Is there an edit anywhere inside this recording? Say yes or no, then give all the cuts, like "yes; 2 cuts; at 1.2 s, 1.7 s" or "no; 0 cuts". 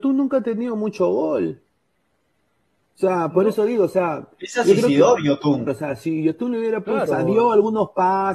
yes; 2 cuts; at 5.7 s, 7.1 s